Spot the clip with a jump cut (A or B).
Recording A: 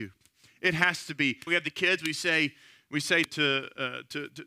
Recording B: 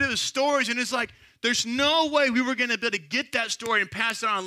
A